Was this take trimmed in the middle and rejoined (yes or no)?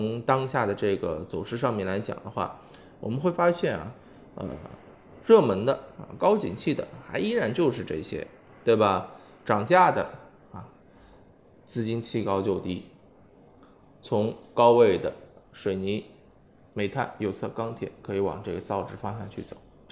no